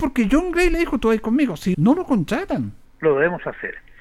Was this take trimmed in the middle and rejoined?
yes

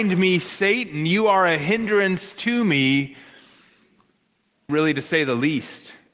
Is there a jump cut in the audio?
yes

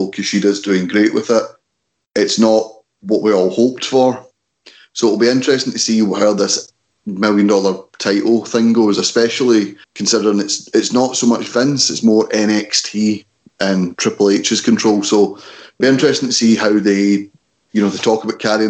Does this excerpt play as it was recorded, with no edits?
no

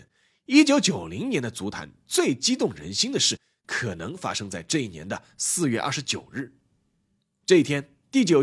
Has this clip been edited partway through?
no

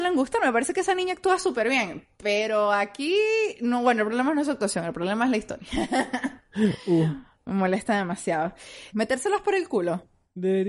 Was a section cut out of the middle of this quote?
yes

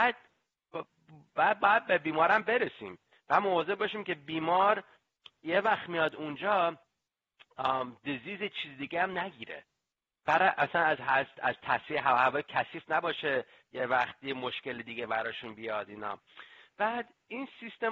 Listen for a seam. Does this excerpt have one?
no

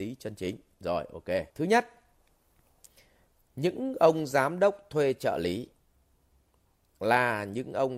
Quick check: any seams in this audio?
yes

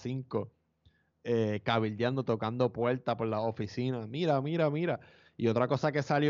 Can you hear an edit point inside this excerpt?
no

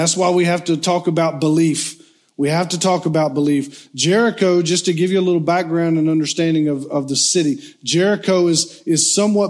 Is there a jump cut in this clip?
no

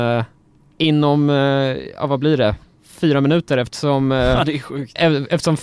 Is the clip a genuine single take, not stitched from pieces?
yes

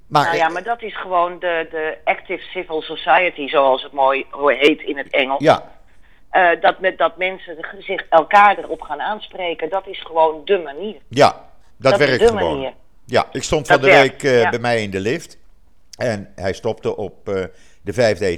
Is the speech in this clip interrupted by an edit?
no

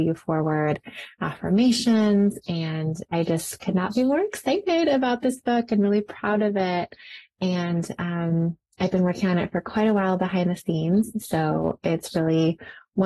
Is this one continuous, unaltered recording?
yes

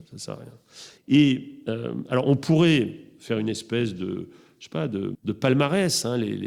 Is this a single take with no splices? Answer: no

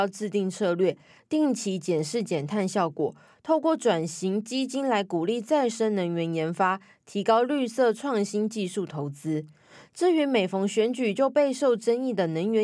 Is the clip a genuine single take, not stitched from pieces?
yes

